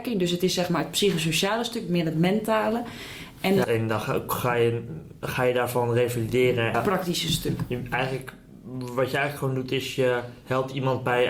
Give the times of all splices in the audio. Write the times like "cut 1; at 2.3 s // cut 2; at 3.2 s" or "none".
cut 1; at 3.6 s // cut 2; at 6.7 s